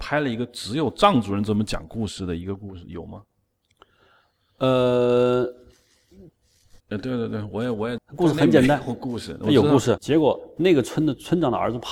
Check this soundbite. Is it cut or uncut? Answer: cut